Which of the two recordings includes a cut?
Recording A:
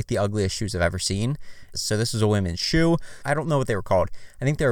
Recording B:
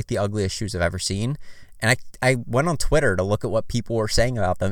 A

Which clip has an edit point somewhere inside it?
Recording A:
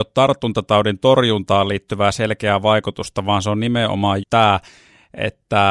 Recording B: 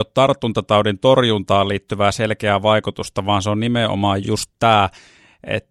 A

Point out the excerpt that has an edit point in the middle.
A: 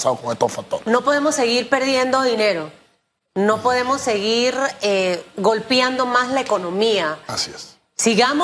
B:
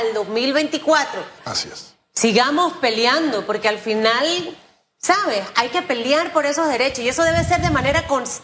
B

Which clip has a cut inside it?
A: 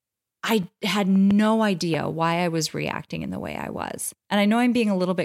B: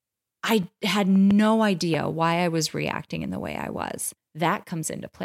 B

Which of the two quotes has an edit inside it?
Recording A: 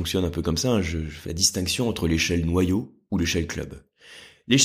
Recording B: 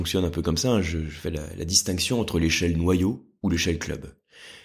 A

